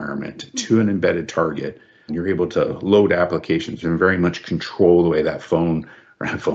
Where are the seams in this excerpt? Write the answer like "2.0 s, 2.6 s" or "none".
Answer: 2.1 s, 3.8 s